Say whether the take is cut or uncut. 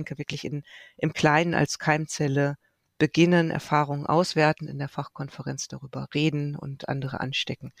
uncut